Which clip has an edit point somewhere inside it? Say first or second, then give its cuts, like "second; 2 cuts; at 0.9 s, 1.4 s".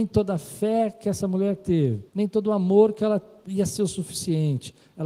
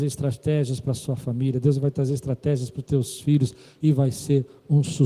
first; 2 cuts; at 2.1 s, 3.4 s